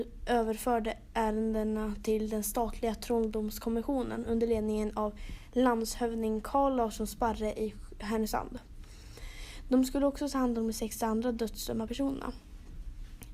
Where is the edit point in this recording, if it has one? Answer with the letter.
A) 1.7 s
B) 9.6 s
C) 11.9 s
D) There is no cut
C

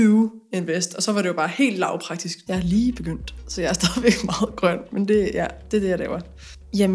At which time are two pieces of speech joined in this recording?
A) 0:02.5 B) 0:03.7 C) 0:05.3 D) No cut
A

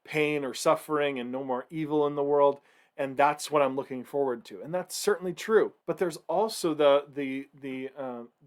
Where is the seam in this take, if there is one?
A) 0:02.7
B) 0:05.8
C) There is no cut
B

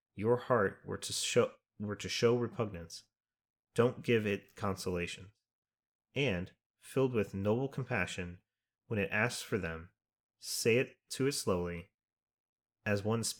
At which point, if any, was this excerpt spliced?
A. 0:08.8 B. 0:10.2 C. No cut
C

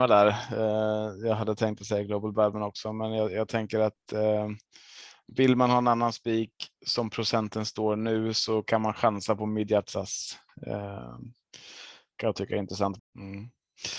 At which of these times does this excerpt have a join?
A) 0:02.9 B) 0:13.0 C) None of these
B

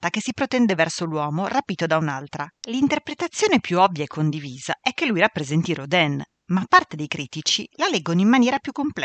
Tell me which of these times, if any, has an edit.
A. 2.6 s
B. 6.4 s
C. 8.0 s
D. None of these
A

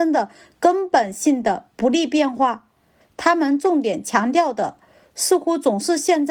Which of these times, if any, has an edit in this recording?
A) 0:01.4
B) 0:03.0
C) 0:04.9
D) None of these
B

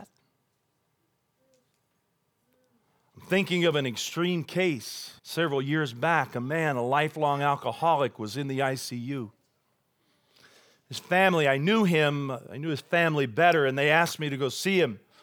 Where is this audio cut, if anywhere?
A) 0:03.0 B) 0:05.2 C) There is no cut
B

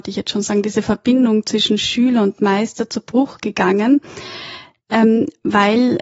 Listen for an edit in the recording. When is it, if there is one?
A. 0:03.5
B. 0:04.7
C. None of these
C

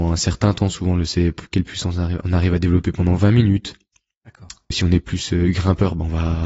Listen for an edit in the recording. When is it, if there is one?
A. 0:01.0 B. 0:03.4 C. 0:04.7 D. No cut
C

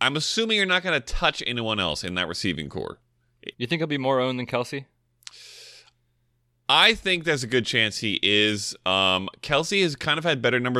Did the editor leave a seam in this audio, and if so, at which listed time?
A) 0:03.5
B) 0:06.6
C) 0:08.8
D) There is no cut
A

